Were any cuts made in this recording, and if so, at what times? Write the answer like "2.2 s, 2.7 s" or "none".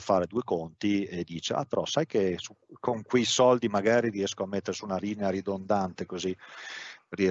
none

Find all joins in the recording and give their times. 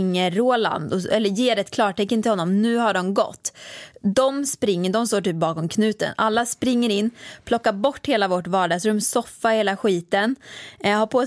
none

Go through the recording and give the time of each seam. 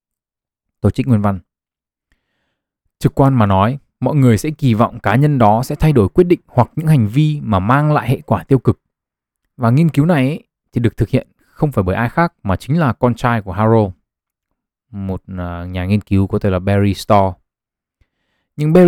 9.5 s

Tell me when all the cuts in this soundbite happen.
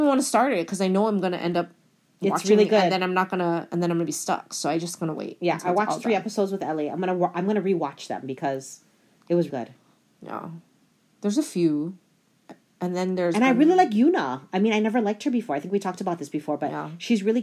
9.5 s

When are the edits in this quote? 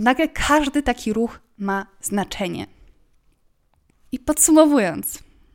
none

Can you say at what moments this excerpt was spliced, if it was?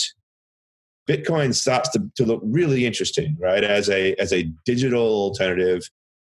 none

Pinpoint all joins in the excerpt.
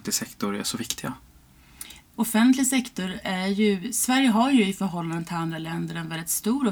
none

